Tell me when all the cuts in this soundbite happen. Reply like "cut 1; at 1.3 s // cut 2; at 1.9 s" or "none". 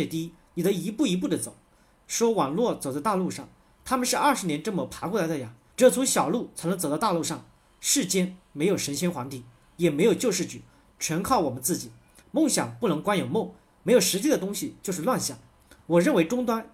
cut 1; at 5.7 s // cut 2; at 12.2 s